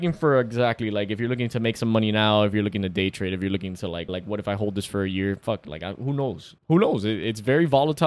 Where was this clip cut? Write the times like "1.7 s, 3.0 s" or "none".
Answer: 4.1 s, 6.6 s